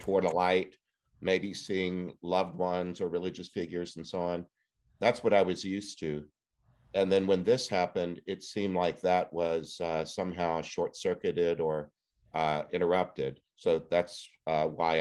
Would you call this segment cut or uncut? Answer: uncut